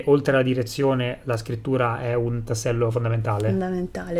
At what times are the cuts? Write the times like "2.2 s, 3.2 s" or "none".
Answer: none

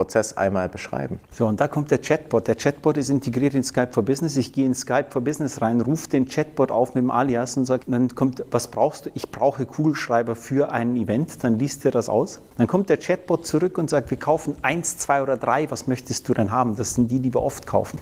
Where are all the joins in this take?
7.8 s

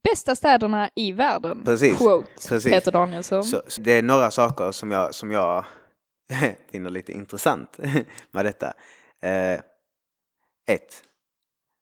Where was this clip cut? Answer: 3.8 s

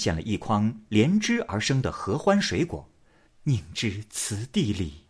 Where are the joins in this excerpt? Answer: 3.2 s

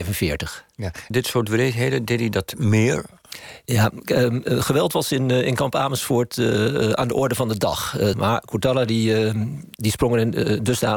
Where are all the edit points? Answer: 1.1 s, 8.1 s

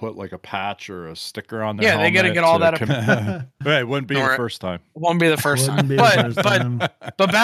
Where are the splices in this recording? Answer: 2.9 s

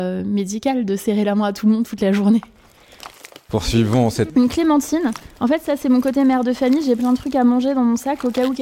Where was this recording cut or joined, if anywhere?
4.3 s

